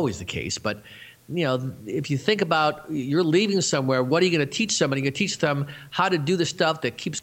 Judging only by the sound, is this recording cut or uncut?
uncut